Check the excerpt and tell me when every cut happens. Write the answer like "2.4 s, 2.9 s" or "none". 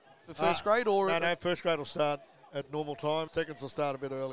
3.3 s